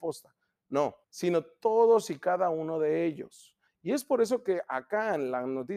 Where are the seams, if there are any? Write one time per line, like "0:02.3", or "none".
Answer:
0:01.0
0:03.7